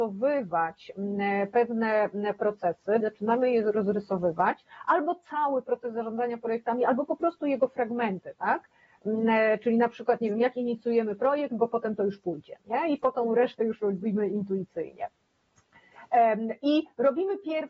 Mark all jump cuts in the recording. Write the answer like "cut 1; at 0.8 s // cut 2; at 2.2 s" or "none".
cut 1; at 3.0 s